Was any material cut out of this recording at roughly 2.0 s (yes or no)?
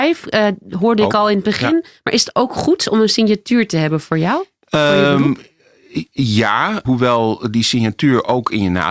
no